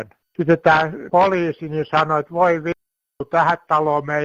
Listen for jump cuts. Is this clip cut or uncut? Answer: uncut